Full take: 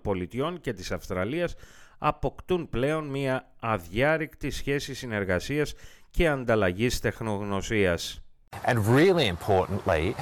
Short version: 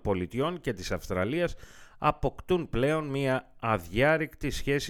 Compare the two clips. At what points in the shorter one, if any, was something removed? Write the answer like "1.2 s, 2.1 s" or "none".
none